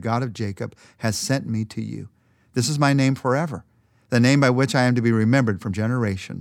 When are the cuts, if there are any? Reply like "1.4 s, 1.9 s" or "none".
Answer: none